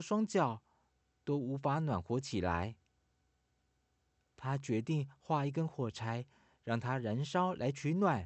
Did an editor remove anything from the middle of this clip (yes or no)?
yes